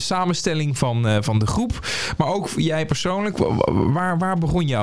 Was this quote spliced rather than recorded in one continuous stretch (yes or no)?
no